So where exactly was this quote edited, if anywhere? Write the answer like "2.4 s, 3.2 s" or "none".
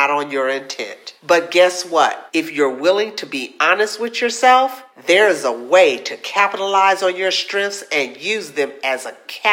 2.3 s